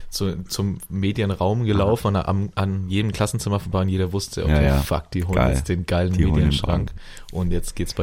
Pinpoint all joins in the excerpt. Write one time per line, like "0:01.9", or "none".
none